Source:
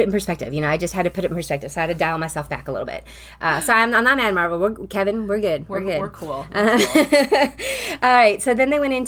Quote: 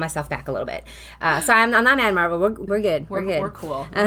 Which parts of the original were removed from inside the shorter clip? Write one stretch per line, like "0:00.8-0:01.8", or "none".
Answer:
0:04.9-0:05.3